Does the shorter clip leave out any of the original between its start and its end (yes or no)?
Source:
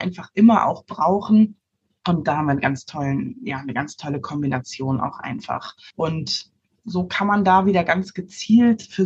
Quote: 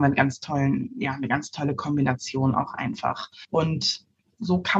no